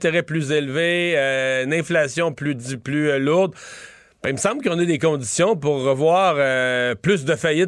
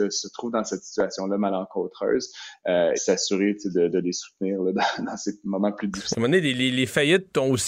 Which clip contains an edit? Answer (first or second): second